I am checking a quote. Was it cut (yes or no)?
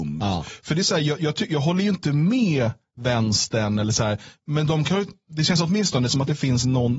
no